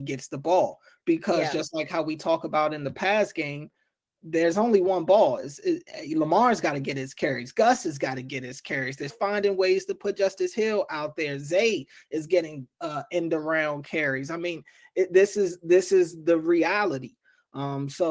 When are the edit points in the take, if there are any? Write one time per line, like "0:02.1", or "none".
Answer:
0:09.1